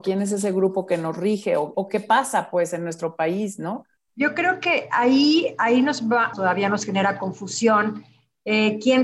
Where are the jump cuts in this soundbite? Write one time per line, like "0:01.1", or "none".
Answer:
0:01.7
0:04.0
0:06.3